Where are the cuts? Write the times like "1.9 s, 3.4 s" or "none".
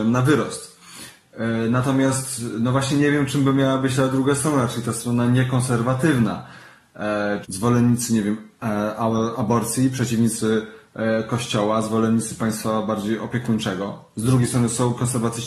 7.4 s